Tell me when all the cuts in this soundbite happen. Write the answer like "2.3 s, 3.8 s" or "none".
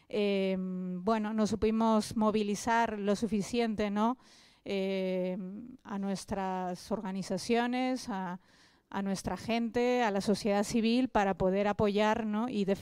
none

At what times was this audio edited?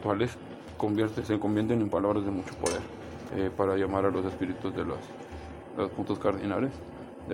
3.3 s

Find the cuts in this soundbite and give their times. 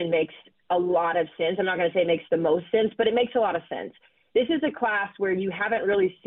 none

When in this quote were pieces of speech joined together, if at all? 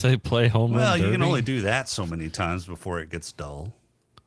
none

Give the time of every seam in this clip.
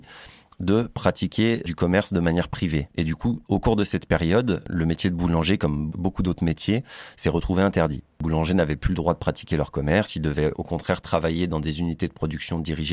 2.9 s

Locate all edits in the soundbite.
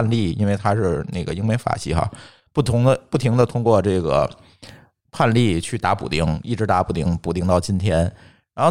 none

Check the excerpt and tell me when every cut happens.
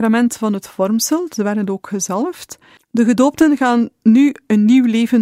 2.8 s

